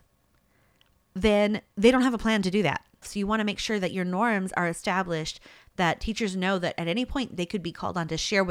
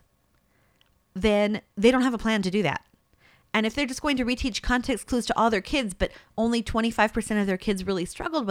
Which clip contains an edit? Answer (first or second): first